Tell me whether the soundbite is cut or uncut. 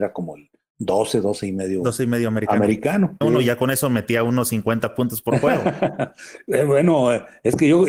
cut